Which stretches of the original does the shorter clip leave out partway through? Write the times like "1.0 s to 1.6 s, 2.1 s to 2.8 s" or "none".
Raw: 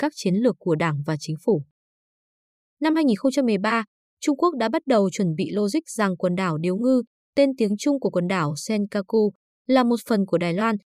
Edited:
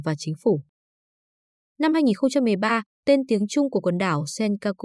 4.0 s to 7.2 s